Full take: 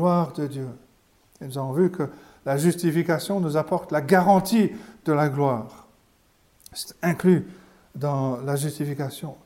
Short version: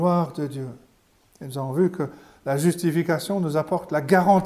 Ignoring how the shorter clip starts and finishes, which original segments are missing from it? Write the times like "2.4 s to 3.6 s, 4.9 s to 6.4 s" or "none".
none